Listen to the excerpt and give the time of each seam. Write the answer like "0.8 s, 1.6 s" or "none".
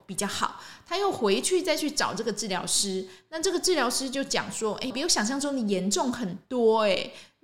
4.9 s